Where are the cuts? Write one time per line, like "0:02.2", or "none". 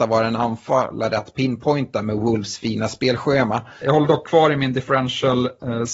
0:03.8